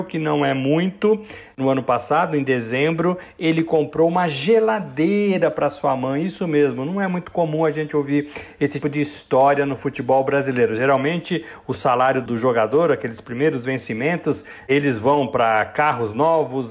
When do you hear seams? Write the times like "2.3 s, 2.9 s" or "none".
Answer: 8.8 s